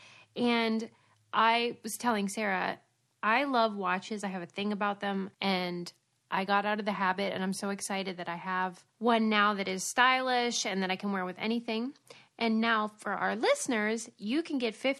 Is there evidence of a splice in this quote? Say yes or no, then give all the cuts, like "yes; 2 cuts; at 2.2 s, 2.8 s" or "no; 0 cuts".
yes; 2 cuts; at 5.3 s, 8.9 s